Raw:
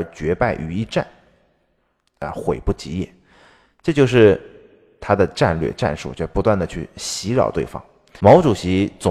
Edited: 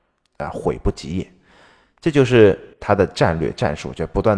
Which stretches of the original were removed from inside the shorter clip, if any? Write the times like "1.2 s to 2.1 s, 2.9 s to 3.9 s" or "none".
4.6 s to 4.9 s